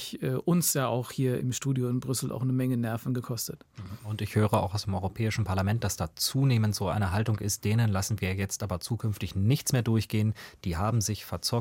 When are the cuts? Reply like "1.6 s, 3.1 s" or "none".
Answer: 1.4 s

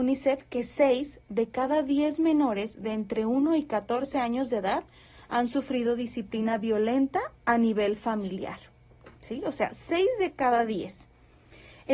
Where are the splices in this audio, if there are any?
none

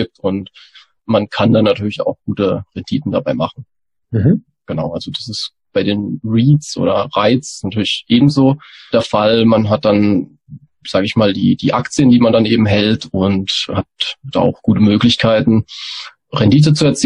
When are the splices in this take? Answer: none

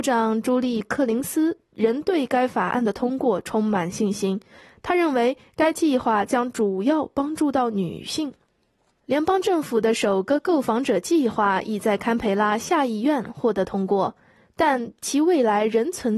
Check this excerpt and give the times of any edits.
9.0 s

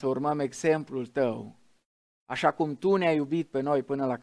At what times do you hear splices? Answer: none

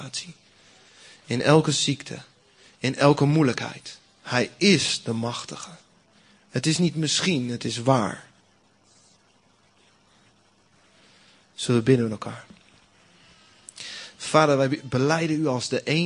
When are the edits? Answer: none

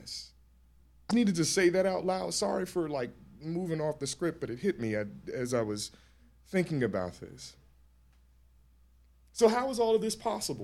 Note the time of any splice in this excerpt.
1.1 s

